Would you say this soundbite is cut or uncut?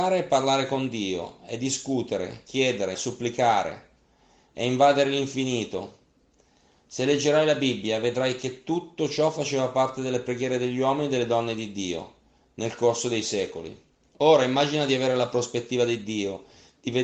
cut